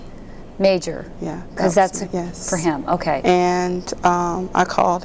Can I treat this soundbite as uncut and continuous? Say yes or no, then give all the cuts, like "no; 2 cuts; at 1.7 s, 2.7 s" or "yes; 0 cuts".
no; 2 cuts; at 2.1 s, 3.2 s